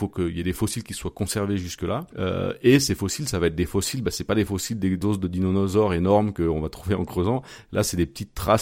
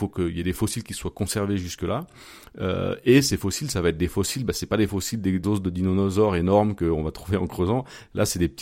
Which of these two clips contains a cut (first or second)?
first